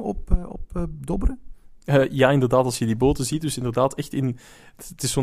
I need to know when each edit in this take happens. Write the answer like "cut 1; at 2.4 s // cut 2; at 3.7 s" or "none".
none